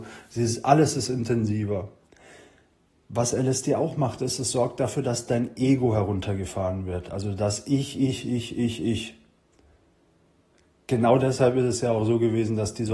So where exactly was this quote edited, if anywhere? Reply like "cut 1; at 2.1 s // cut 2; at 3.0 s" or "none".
none